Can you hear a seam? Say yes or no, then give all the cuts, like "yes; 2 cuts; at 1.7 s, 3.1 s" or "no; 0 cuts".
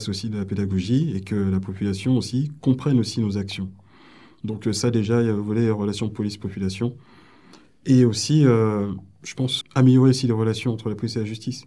yes; 1 cut; at 9.6 s